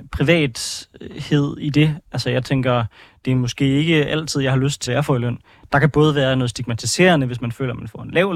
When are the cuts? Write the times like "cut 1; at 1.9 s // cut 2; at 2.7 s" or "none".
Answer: cut 1; at 4.9 s